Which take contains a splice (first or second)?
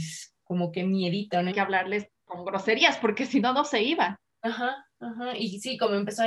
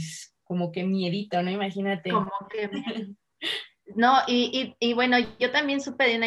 first